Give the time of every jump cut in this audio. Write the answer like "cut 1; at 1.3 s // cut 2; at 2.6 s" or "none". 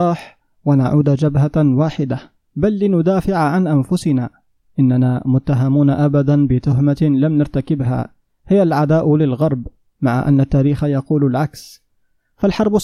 cut 1; at 2.5 s